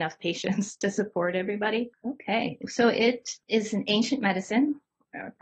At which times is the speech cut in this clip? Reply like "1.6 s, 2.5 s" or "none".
1.9 s, 3.4 s